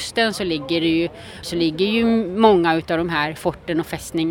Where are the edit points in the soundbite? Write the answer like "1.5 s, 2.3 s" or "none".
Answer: 1.4 s